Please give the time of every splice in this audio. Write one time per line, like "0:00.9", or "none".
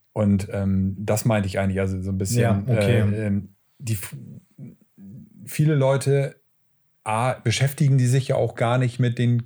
none